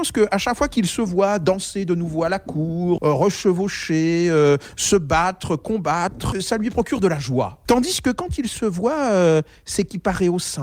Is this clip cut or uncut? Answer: cut